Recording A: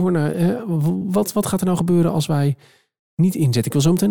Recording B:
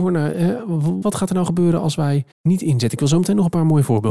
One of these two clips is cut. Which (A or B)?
B